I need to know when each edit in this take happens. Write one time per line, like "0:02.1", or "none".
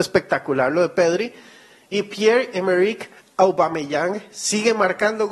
none